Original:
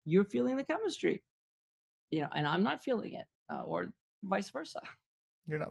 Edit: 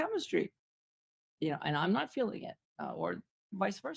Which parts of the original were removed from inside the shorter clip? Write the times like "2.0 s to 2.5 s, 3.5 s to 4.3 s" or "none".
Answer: none